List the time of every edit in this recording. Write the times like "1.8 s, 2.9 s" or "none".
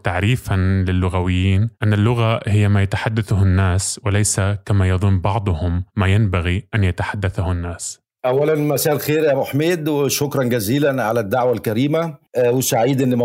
1.7 s, 5.9 s, 8.2 s